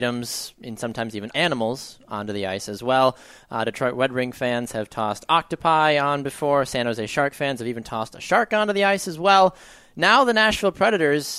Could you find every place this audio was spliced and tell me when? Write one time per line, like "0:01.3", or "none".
0:01.3

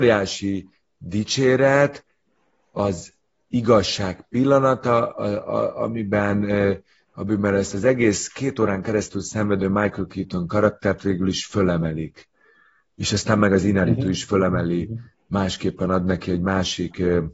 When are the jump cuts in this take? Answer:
none

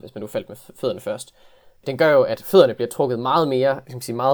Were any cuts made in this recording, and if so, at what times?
none

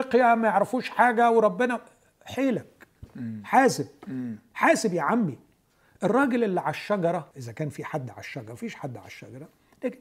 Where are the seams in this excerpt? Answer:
0:07.3

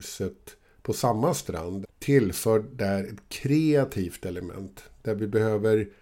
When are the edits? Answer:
0:01.8

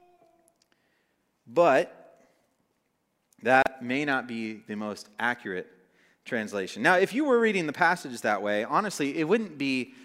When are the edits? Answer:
none

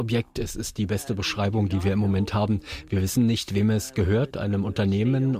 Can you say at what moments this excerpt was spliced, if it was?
0:04.3

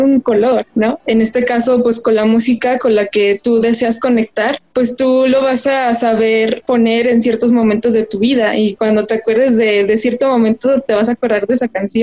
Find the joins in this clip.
0:01.0

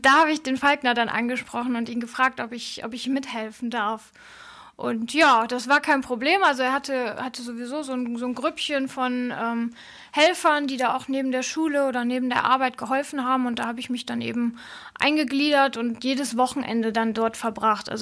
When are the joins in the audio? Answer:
none

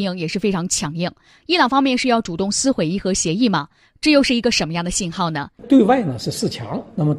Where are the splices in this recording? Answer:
0:05.6

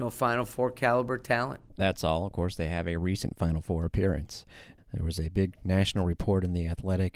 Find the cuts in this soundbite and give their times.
0:04.8

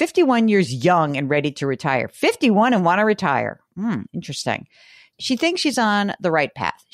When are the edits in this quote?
none

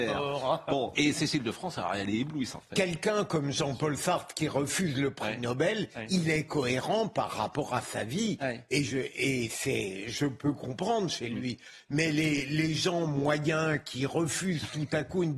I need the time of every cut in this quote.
0:00.9
0:02.7

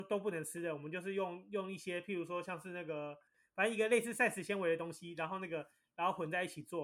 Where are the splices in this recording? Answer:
none

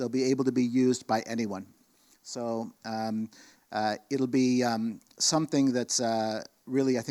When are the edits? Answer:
none

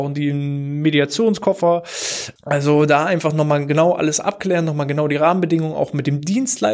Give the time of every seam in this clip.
0:02.4

